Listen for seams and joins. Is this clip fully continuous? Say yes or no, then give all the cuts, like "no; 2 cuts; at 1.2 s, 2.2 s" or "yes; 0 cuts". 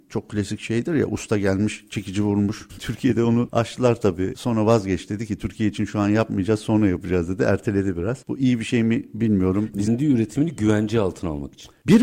no; 2 cuts; at 2.7 s, 9.9 s